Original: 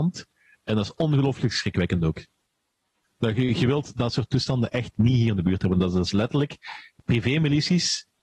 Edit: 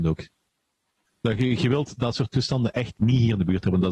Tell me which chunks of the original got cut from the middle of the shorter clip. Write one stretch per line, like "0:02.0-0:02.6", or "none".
none